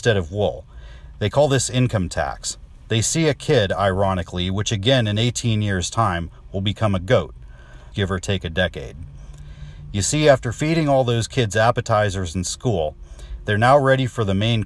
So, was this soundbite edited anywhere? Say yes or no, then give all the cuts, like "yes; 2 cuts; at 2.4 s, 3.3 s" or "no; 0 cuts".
yes; 1 cut; at 7.9 s